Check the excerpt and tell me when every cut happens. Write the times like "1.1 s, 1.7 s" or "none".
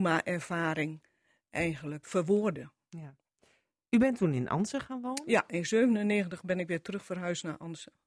2.0 s